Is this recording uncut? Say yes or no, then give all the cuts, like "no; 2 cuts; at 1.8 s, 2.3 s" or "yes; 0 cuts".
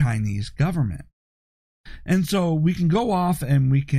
yes; 0 cuts